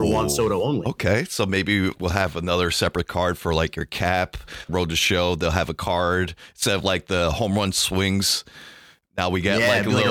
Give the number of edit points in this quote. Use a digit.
2